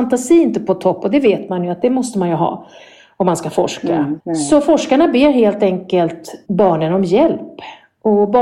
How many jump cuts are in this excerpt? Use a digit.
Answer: 2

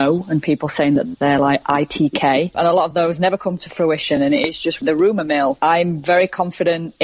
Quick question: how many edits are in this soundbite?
0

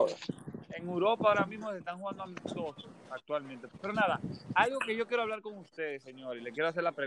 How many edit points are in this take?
1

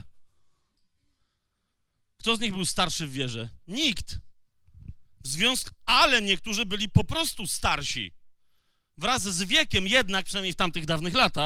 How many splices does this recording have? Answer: 0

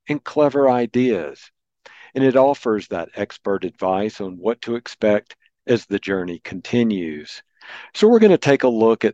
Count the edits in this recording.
0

